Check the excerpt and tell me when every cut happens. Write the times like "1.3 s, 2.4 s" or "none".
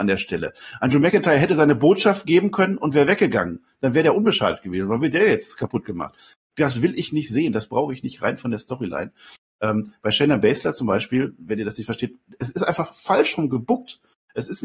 none